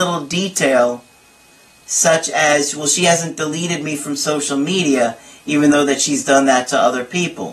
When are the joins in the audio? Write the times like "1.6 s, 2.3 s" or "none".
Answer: none